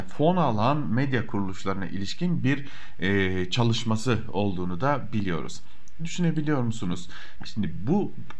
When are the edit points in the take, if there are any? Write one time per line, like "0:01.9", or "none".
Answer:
0:06.0
0:07.4